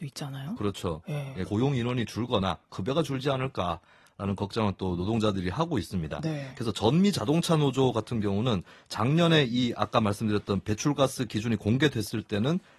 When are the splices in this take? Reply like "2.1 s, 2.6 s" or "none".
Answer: 1.5 s